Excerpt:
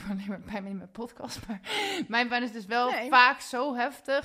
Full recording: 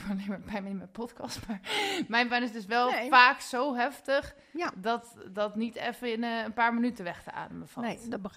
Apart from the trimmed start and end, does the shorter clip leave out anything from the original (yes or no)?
no